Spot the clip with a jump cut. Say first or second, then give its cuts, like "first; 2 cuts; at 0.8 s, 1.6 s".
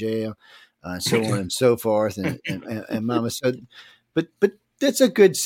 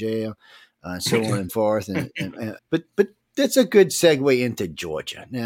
second; 2 cuts; at 1.5 s, 2.6 s